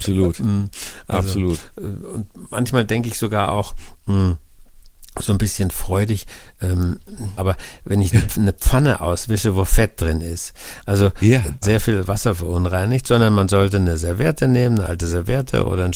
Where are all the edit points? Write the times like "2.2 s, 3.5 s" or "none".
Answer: 7.4 s, 11.6 s